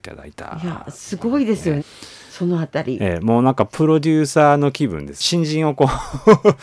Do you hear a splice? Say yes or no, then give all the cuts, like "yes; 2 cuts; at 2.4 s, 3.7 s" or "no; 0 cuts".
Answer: yes; 1 cut; at 1.8 s